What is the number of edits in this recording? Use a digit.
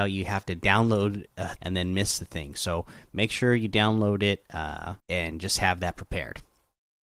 2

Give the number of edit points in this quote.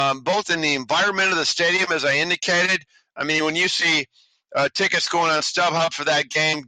0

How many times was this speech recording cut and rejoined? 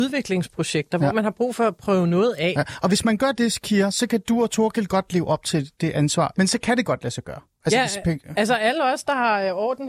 1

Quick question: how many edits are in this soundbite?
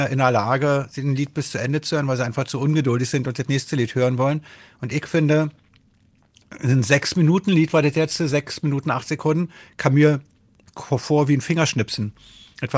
0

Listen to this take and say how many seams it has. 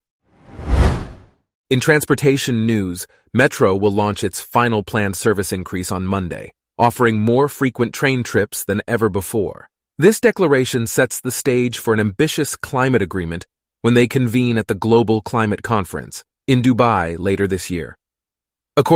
2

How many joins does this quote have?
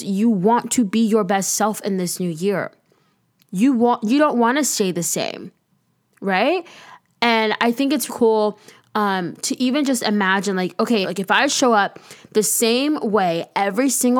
2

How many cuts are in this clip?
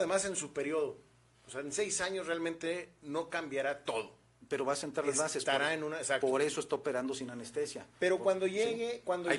0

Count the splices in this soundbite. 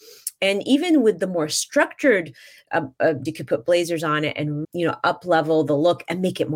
2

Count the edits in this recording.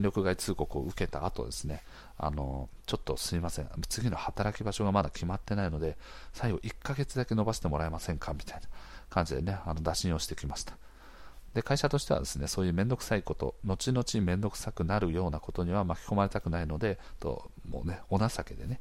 0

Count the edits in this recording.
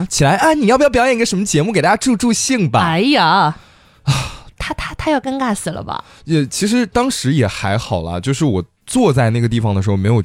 1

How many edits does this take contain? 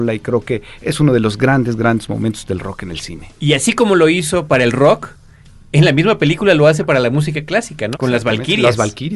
1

